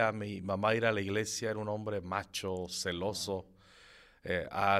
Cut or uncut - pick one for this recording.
uncut